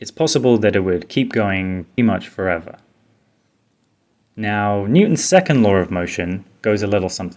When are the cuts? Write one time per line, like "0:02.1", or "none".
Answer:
0:02.0